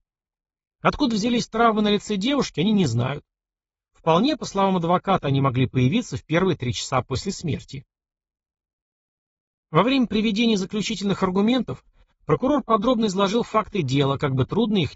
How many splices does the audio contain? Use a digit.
0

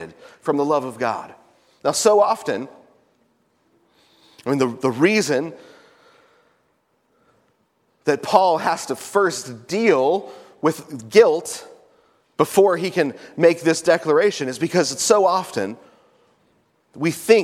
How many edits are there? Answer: 0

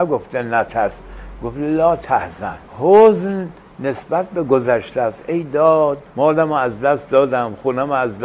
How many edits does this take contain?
2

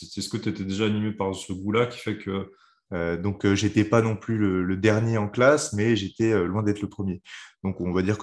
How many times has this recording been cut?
1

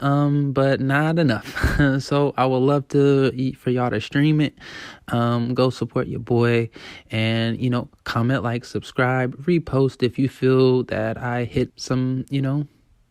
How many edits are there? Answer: 1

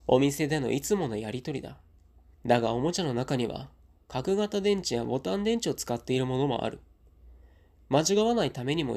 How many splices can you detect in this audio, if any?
1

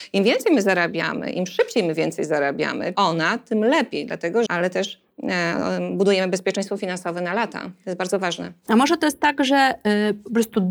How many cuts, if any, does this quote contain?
2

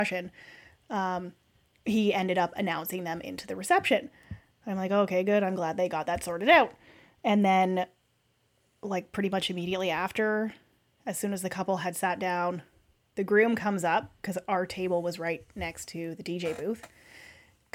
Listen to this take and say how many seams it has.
0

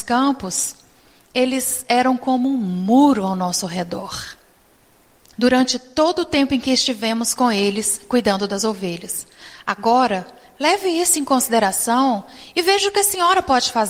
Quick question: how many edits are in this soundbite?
1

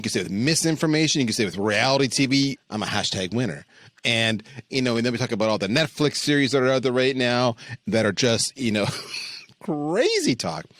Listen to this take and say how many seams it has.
2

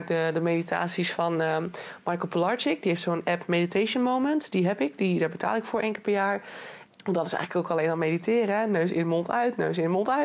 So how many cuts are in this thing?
1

